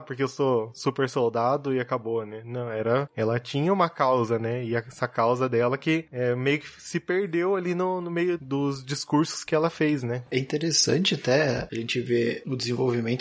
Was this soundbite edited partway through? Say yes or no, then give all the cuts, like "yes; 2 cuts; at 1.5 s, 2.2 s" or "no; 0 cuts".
no; 0 cuts